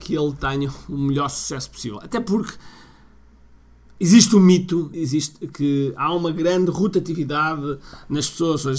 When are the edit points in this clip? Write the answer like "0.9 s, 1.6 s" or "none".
4.9 s